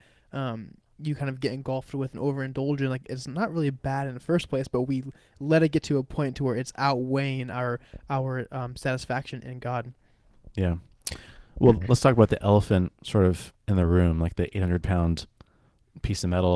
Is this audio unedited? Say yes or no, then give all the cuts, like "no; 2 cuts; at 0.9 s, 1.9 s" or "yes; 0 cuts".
yes; 0 cuts